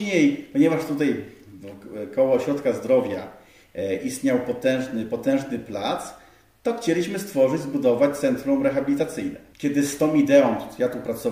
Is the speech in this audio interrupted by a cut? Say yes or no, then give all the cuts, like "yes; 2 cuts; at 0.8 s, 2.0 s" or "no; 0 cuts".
yes; 1 cut; at 9.5 s